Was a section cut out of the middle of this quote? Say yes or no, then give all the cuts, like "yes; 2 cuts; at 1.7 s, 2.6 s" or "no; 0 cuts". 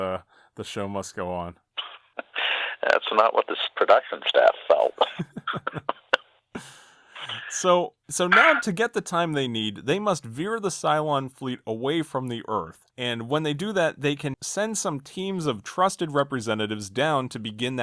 yes; 2 cuts; at 12.9 s, 14.3 s